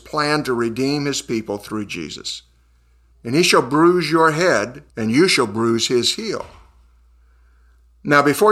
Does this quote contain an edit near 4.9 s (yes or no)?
yes